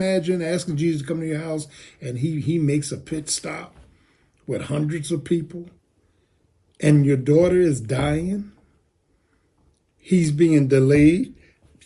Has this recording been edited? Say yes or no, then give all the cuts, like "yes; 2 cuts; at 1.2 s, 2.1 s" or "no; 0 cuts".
no; 0 cuts